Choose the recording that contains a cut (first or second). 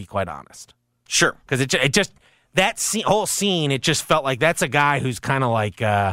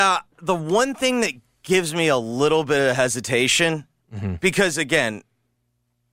first